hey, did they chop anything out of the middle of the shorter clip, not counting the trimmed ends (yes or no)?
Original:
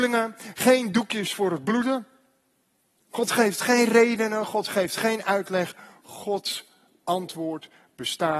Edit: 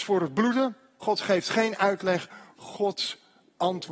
yes